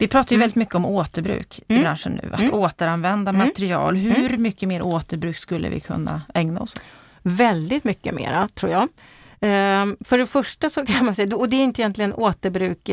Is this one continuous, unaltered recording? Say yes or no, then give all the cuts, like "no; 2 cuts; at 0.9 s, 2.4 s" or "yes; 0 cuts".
yes; 0 cuts